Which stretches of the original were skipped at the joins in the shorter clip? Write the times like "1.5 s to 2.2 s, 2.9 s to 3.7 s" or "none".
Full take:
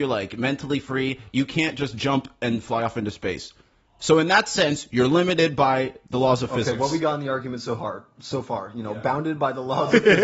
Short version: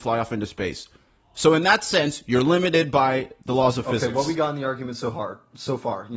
none

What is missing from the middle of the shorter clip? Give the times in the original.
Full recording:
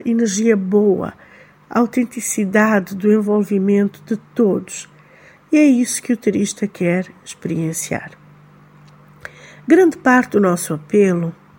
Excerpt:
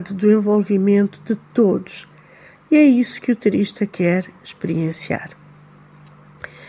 none

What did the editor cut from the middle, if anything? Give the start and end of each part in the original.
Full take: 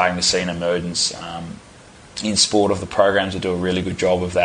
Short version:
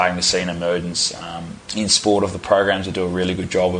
1.6 s to 2.1 s

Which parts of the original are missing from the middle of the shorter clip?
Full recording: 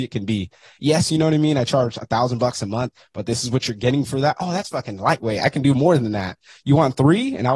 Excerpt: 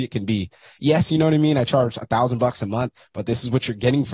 none

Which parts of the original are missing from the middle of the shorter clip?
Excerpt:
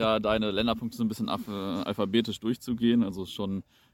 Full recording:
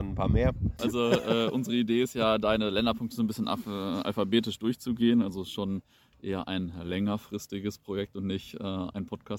none

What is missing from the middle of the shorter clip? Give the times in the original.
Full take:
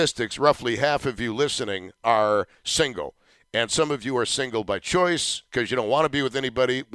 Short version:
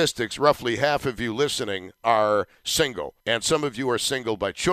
3.2 s to 3.5 s

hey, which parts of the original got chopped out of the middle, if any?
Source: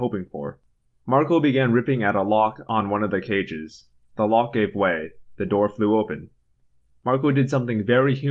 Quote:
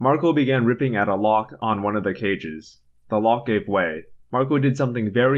5.3 s to 6.9 s

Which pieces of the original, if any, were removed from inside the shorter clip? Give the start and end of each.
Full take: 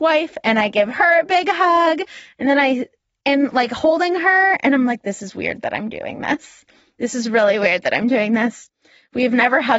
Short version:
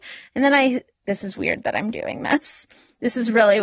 3.1 s to 5.0 s

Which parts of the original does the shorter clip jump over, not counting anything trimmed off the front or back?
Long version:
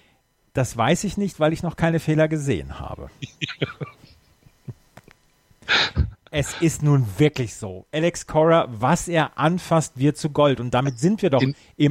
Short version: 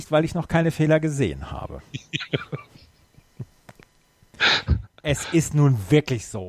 none

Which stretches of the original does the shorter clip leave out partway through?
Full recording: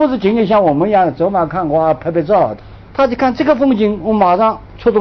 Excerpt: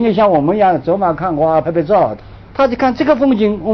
2.0 s to 2.0 s

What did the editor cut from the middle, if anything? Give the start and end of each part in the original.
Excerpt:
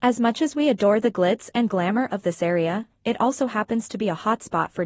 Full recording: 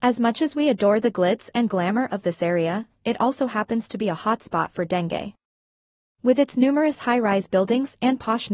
none

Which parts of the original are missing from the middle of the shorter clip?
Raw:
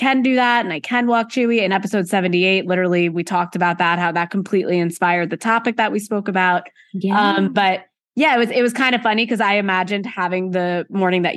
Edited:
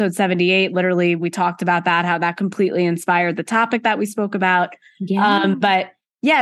none

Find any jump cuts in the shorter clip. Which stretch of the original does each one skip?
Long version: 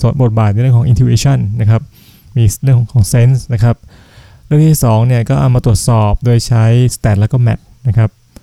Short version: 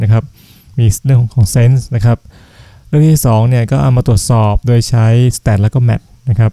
none

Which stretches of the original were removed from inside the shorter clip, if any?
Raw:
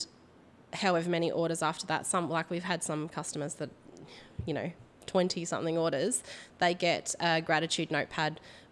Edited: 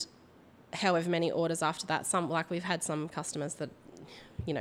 none

